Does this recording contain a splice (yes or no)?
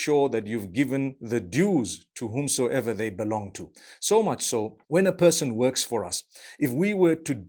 yes